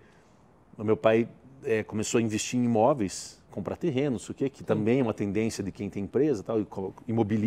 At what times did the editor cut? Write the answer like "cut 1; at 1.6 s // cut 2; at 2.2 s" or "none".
cut 1; at 3.5 s